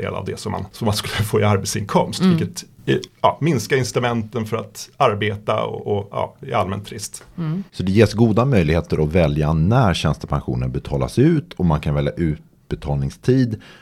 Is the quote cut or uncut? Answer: cut